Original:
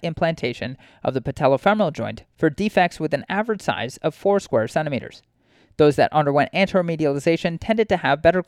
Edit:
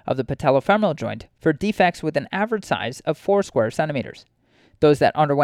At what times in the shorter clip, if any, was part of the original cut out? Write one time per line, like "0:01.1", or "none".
none